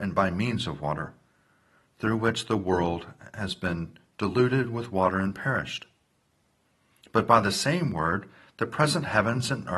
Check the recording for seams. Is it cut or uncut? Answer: uncut